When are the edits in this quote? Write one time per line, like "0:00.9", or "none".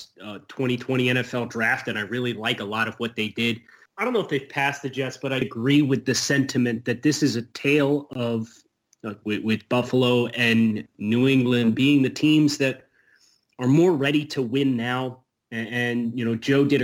0:03.9
0:05.4
0:09.2